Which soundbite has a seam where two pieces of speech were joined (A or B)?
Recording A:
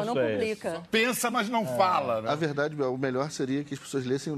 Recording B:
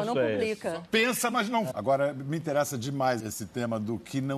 B